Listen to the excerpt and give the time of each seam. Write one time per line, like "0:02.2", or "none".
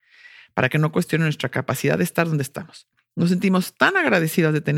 none